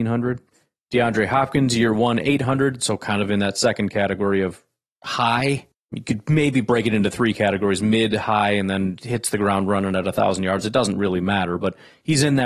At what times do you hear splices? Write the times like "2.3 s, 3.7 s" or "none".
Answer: 2.8 s